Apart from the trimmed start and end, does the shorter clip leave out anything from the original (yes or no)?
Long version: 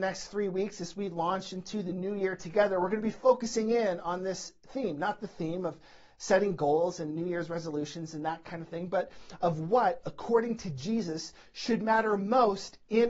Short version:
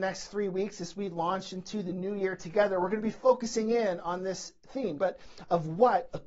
yes